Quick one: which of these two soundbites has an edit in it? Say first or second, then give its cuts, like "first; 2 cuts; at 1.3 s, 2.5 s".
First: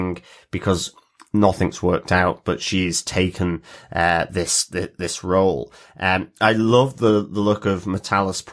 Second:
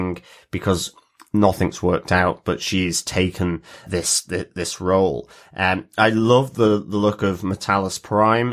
second; 1 cut; at 3.8 s